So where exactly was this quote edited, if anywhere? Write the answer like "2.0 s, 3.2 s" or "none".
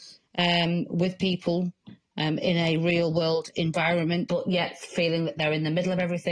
4.3 s